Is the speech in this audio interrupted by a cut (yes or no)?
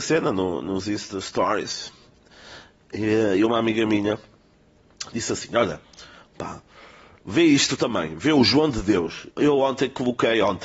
yes